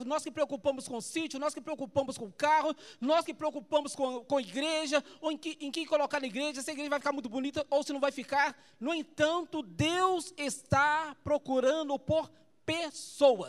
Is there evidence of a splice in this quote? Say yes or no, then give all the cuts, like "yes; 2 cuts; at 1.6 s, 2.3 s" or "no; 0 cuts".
no; 0 cuts